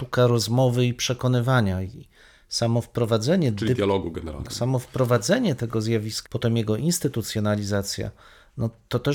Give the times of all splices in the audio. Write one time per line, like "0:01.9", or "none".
0:04.4
0:06.2